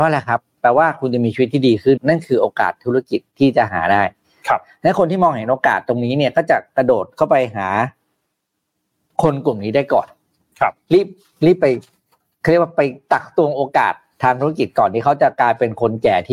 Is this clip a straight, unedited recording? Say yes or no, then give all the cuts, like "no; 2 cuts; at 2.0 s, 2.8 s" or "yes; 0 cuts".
no; 1 cut; at 2.0 s